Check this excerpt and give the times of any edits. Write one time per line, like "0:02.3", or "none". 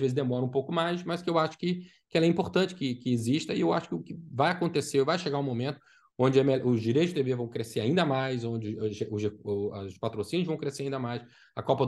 none